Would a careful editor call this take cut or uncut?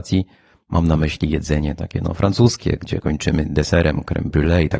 uncut